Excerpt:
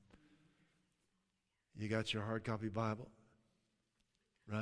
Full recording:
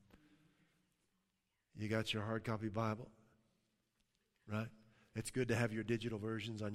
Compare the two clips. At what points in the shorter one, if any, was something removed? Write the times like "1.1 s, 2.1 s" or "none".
none